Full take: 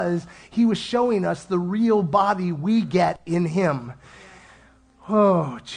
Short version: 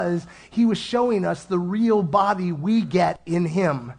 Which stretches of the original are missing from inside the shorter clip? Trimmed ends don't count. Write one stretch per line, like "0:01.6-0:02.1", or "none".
none

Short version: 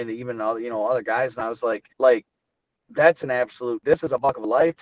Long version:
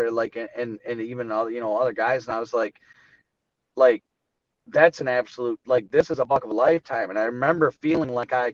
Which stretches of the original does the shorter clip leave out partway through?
0:02.8-0:03.7
0:05.6-0:05.9

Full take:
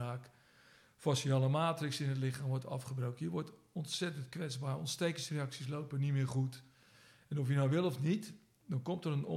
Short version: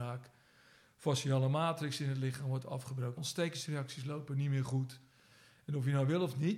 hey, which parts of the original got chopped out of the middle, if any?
0:03.2-0:04.8

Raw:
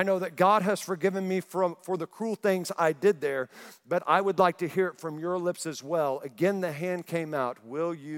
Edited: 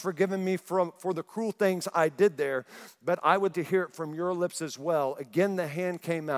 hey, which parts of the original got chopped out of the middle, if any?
0:04.4-0:04.6

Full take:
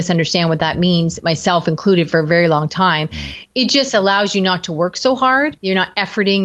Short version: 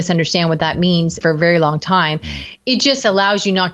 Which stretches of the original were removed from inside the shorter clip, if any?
0:01.2-0:02.1

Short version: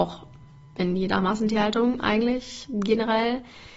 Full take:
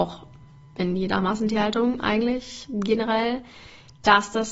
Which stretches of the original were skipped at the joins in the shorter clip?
none

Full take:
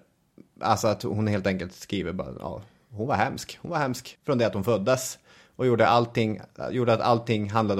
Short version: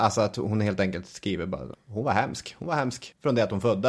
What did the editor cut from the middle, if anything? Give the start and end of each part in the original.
0:02.4-0:02.8

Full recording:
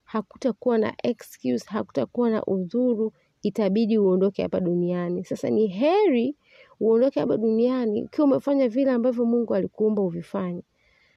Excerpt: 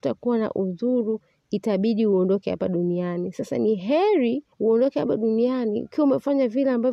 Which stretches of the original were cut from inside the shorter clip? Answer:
0:06.4-0:06.7

